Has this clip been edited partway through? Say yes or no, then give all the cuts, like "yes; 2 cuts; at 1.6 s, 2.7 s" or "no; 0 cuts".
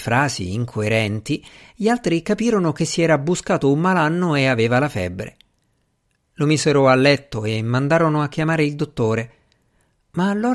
no; 0 cuts